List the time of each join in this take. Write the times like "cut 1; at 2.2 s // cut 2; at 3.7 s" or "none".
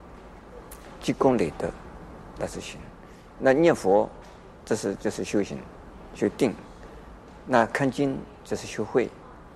cut 1; at 4.6 s